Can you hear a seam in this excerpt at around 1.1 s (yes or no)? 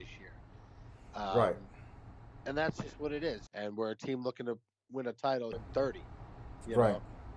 no